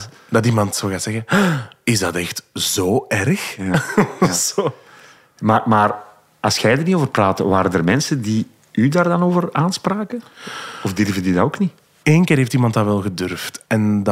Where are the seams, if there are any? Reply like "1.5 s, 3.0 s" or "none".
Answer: 12.0 s